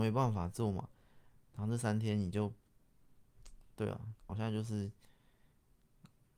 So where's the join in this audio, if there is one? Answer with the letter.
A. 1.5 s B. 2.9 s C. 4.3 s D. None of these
C